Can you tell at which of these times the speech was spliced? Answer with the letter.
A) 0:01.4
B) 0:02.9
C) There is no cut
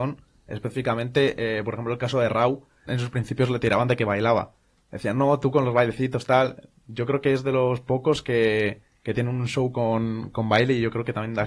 B